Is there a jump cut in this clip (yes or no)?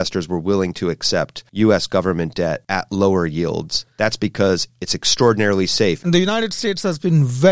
yes